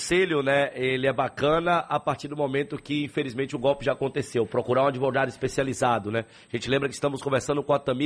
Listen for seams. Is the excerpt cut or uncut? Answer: uncut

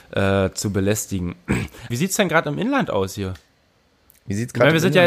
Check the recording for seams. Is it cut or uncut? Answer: cut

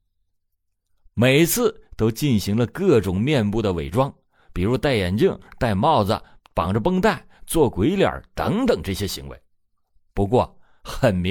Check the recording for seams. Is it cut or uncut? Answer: uncut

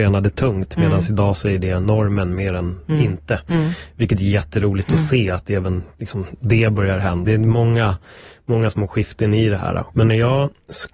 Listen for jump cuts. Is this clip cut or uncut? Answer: cut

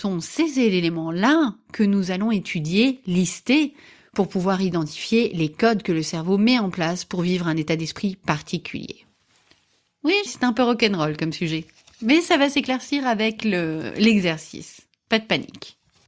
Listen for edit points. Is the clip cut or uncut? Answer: cut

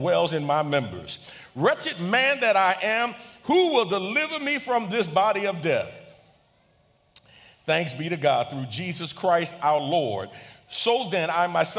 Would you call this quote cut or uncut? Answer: uncut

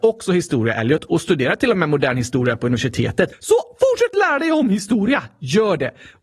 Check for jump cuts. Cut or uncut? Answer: cut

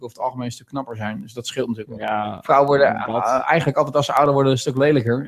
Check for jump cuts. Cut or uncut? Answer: uncut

